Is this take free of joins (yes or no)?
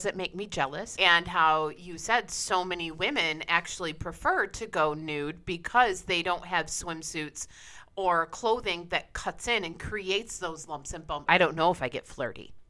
no